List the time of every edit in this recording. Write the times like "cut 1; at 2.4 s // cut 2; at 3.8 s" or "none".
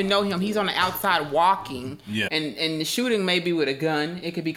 cut 1; at 2.3 s